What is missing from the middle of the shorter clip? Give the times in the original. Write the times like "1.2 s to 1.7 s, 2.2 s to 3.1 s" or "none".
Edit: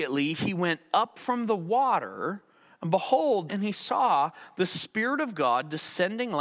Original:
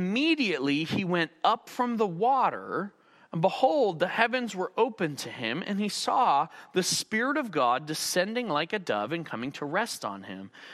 4.0 s to 5.6 s